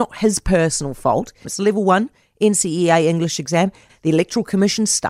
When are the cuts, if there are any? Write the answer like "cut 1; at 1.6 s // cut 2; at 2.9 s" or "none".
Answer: cut 1; at 1.4 s // cut 2; at 3.9 s